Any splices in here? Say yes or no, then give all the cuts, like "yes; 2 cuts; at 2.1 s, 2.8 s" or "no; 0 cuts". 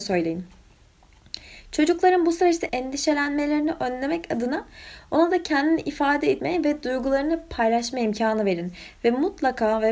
no; 0 cuts